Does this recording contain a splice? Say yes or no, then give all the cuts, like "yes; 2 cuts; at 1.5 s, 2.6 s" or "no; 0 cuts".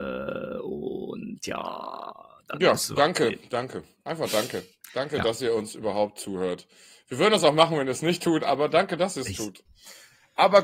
yes; 1 cut; at 9.7 s